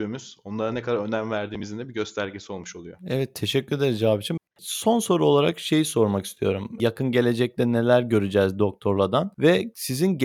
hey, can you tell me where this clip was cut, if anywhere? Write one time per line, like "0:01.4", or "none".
0:04.4
0:06.8